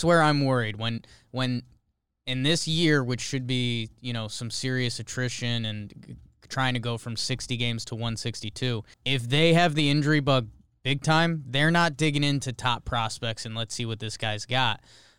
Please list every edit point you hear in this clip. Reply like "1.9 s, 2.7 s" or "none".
8.9 s